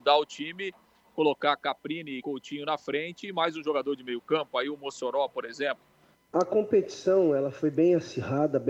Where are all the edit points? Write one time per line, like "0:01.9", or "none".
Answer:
0:06.1